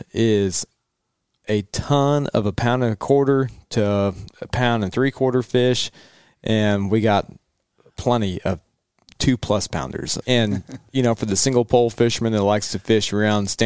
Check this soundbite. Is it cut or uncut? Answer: cut